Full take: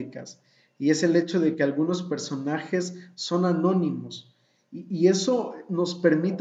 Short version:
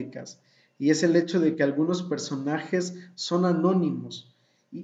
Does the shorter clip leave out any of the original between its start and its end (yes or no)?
no